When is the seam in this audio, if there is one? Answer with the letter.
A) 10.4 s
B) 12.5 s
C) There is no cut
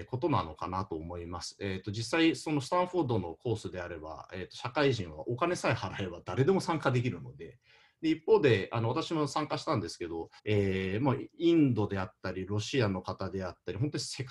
A